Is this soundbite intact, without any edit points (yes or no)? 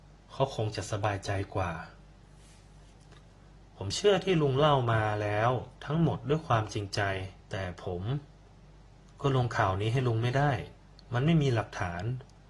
no